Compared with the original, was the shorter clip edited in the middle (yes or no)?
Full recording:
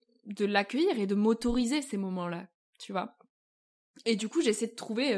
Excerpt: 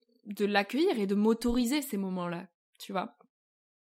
no